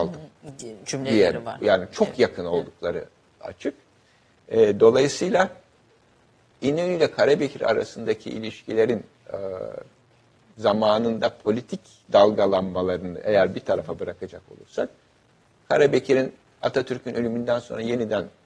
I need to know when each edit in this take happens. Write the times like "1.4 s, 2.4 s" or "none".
none